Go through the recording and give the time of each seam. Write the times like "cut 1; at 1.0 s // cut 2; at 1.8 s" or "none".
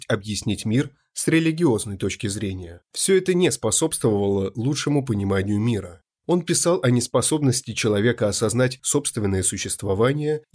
cut 1; at 2.9 s // cut 2; at 6.2 s